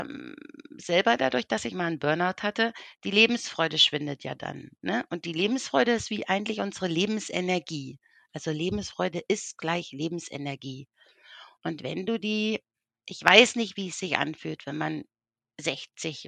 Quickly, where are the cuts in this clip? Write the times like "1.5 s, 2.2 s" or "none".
none